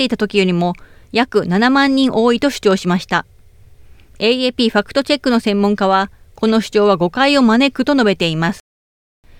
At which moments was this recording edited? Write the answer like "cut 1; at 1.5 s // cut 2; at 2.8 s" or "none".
none